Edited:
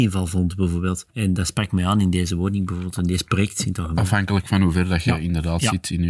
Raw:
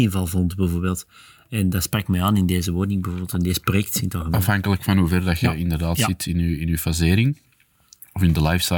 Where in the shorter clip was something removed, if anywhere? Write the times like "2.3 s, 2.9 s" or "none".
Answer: 1.1 s